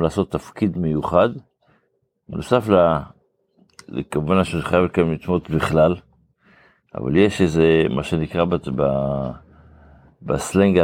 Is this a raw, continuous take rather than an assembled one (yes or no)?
yes